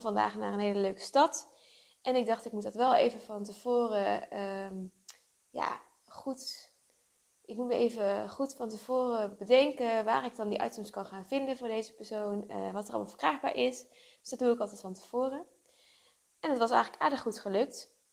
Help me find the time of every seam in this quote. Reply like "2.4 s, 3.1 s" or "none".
none

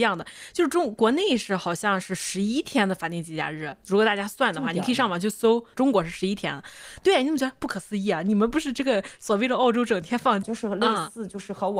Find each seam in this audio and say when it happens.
7.0 s, 10.4 s

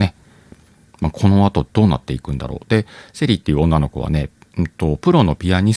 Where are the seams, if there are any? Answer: none

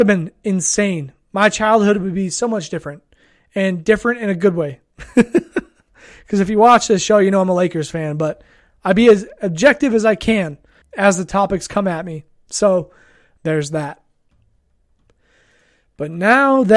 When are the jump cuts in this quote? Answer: 10.8 s, 13.4 s

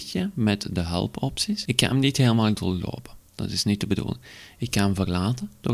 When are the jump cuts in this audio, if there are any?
1.6 s

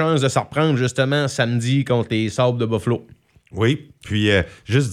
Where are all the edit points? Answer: none

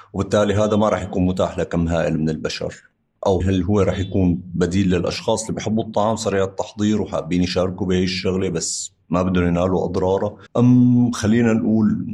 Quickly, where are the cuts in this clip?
3.4 s, 10.5 s

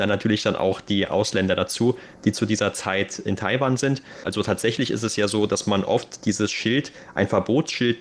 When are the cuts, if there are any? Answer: 4.2 s

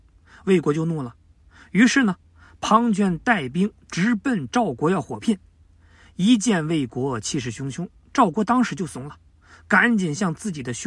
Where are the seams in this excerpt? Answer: none

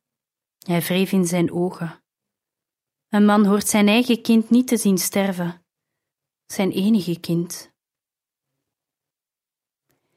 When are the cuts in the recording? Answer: none

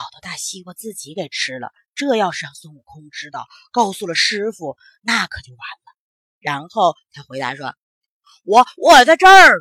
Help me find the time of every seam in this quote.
6.2 s, 7.8 s

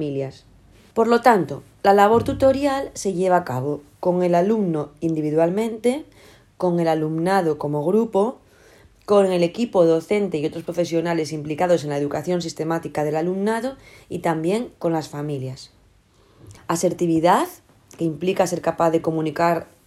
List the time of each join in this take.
0.9 s, 16.6 s

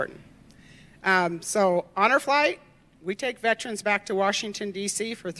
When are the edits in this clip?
none

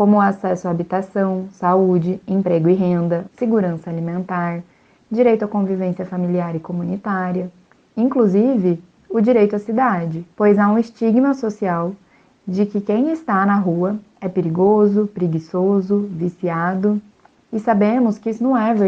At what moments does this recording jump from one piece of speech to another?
3.3 s, 10.3 s

